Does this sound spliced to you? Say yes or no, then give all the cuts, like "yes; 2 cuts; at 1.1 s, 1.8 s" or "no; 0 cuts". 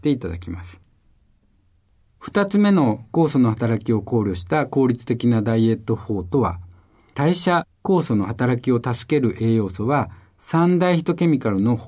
no; 0 cuts